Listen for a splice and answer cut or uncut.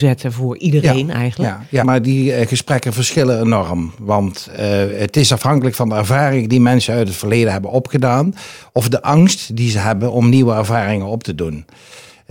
cut